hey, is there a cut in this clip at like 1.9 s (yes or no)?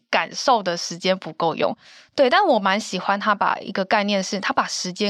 no